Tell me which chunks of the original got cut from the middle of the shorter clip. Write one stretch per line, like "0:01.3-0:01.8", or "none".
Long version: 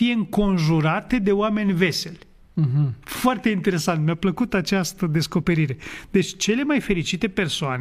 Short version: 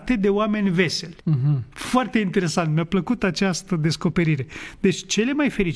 0:02.2-0:02.5